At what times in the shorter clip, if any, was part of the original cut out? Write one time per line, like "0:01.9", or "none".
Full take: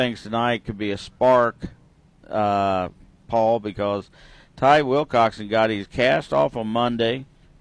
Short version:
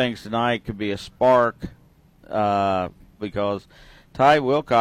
0:03.2